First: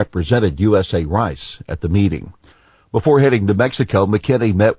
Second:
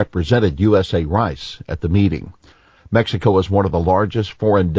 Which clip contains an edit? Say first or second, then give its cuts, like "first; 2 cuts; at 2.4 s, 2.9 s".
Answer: second; 1 cut; at 2.8 s